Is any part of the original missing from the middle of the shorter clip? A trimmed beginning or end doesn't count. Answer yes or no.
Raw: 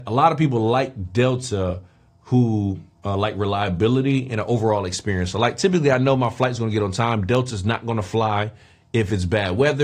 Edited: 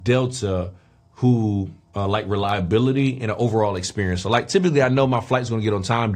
no